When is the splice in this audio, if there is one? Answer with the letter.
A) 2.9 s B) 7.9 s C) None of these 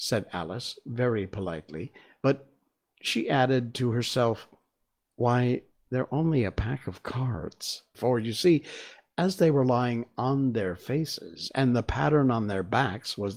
B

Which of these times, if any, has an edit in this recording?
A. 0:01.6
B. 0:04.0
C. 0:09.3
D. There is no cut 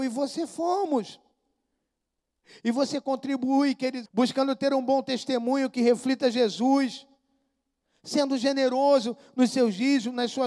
B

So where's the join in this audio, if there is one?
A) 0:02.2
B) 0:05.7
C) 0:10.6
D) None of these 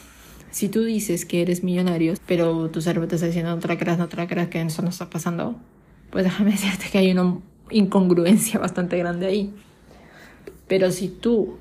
A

